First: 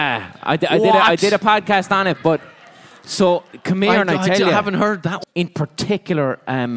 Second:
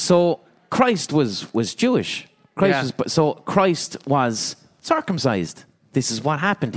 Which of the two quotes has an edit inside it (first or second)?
first